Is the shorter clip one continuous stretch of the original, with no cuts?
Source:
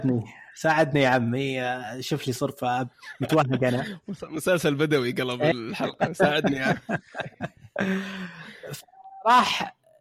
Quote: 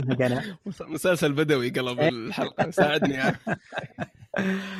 yes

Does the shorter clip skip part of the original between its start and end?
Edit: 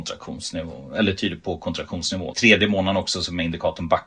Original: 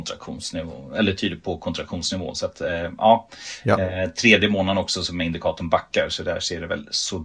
yes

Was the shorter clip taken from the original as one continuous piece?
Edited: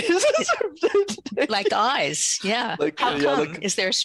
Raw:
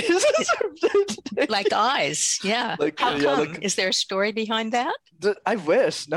yes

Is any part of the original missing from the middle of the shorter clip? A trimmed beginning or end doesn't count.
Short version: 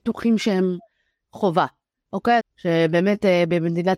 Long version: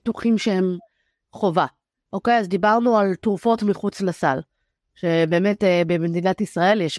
yes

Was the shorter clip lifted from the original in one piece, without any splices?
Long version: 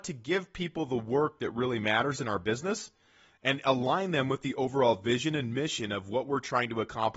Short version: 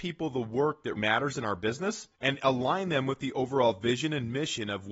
no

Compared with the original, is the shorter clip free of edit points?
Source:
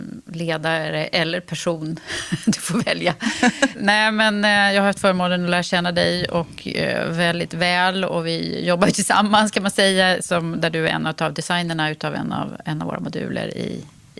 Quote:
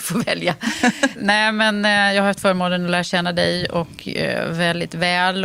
yes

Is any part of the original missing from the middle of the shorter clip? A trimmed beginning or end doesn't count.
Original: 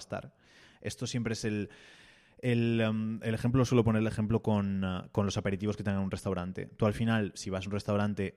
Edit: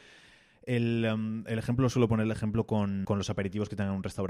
yes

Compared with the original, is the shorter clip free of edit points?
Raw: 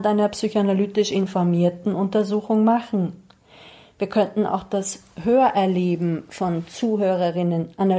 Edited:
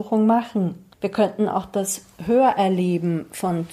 no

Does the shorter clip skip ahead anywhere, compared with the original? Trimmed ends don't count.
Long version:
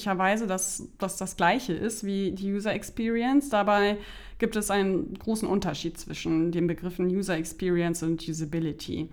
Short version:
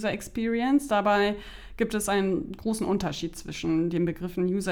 no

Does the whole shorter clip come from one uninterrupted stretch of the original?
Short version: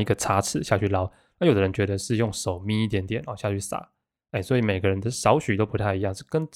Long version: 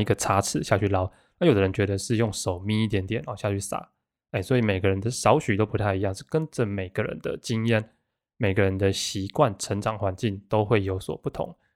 yes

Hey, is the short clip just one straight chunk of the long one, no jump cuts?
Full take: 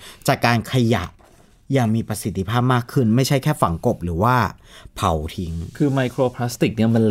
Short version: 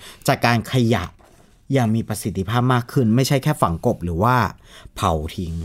yes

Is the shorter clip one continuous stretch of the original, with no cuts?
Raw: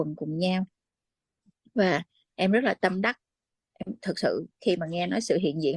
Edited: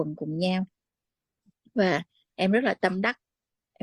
yes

